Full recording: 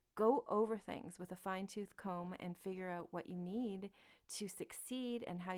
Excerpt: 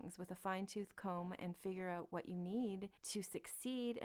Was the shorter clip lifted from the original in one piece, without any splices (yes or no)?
no